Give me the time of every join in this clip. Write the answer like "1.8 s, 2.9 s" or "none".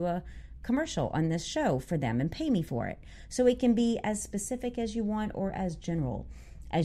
none